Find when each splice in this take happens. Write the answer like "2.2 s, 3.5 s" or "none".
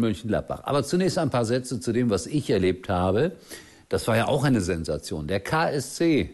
none